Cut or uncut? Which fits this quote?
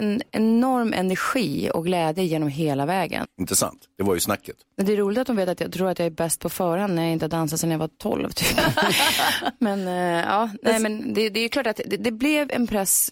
cut